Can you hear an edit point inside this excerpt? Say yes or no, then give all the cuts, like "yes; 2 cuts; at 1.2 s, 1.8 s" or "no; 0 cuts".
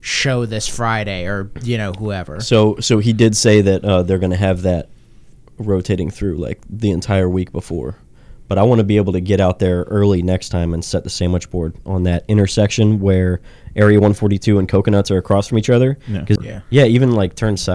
yes; 1 cut; at 16.4 s